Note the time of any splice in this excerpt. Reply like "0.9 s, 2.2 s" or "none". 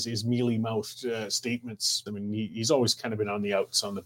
2.1 s